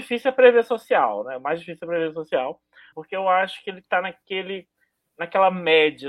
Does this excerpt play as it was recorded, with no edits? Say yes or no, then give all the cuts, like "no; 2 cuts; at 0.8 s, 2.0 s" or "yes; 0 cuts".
no; 1 cut; at 2.9 s